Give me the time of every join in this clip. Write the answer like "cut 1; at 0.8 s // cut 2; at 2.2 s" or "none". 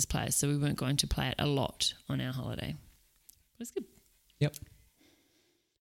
none